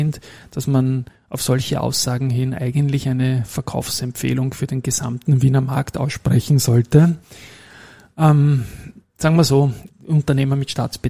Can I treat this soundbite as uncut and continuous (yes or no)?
no